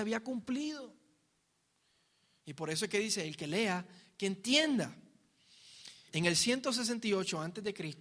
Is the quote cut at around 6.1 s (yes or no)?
yes